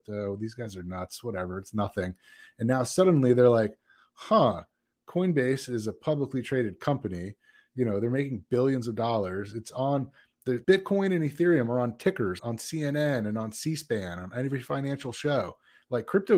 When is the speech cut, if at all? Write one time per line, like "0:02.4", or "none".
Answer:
0:10.6
0:12.4